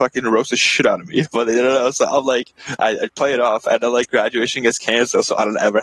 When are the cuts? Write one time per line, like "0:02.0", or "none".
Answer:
none